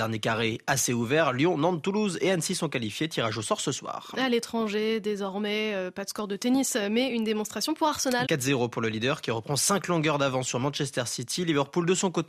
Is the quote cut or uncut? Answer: cut